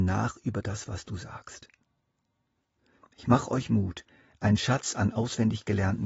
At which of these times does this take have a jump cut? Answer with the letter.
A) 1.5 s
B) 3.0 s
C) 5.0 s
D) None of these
B